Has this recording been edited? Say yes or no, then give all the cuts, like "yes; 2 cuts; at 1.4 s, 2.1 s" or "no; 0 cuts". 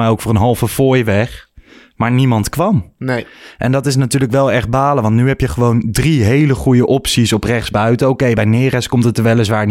no; 0 cuts